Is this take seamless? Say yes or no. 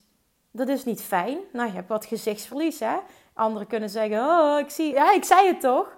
no